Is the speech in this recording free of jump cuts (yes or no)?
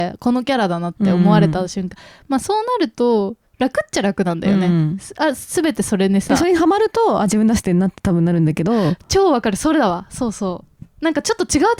yes